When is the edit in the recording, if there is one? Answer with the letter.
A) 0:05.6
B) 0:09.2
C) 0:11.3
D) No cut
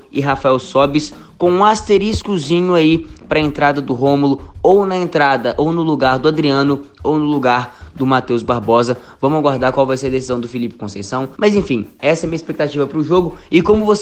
C